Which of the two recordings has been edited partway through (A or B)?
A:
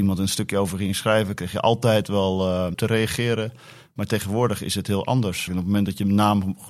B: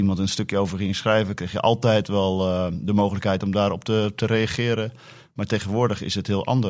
A